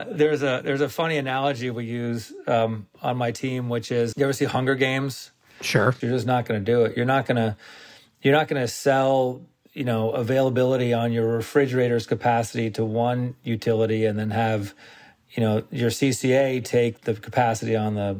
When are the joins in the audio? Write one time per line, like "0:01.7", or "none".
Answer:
0:04.1
0:06.0
0:17.0